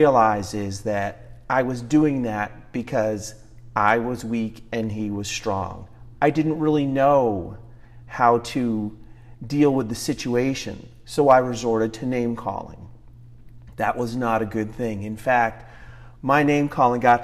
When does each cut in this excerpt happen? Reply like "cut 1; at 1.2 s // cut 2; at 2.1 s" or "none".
cut 1; at 6.1 s